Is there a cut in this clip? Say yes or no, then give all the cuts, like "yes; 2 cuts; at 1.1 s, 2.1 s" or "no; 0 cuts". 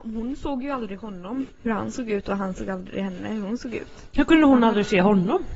no; 0 cuts